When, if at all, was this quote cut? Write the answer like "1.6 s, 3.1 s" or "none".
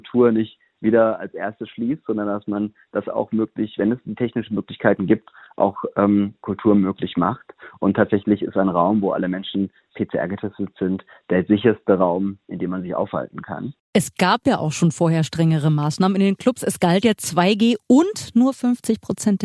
none